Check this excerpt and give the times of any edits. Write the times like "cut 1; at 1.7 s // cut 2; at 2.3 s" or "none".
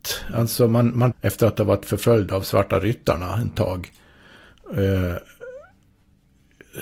cut 1; at 1.1 s